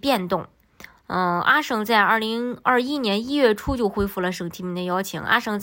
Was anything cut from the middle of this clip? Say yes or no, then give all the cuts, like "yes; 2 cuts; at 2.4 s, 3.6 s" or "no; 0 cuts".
no; 0 cuts